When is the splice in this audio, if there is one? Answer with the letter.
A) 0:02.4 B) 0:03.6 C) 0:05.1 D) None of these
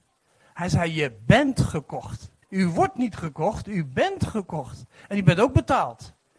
A